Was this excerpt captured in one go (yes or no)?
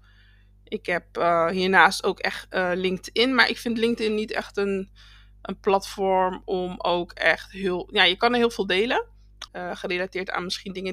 no